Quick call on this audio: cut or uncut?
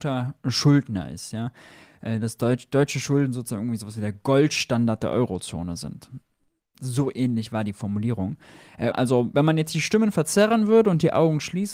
cut